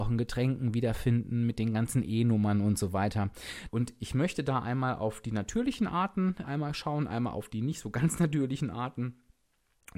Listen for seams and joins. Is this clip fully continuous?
no; 2 cuts; at 3.7 s, 6.4 s

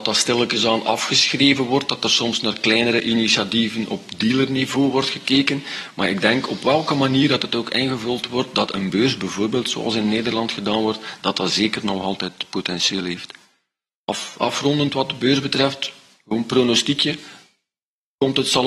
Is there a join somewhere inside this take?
no; 0 cuts

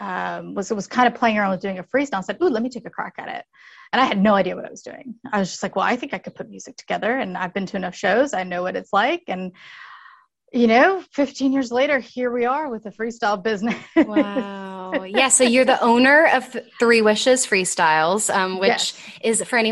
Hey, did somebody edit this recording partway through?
no; 0 cuts

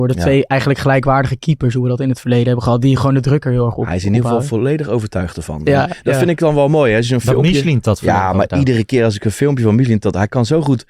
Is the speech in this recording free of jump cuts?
yes; 0 cuts

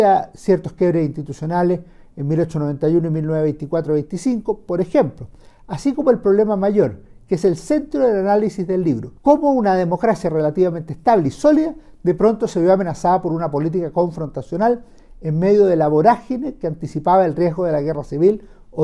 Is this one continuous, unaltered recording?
no; 1 cut; at 9.2 s

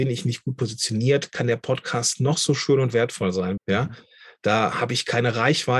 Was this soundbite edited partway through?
yes; 1 cut; at 3.6 s

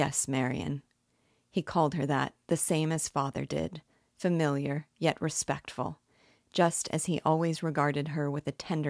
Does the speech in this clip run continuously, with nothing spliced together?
yes; 0 cuts

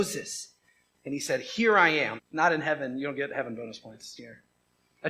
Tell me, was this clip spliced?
yes; 2 cuts; at 2.2 s, 4.2 s

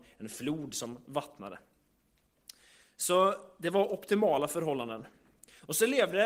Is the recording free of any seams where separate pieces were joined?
yes; 0 cuts

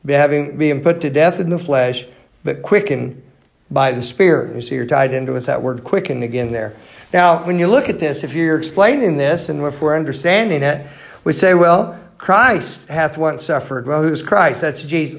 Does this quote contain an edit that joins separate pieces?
no; 0 cuts

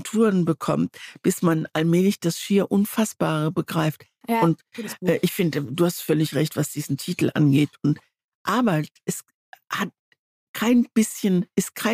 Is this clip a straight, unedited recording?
no; 1 cut; at 4.2 s

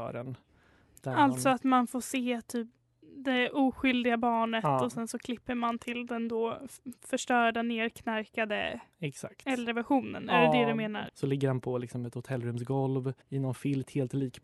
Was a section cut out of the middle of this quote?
yes; 2 cuts; at 11.1 s, 13.2 s

